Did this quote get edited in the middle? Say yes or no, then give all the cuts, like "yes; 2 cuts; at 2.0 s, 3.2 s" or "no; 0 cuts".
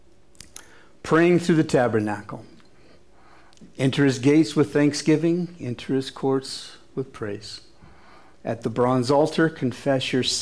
no; 0 cuts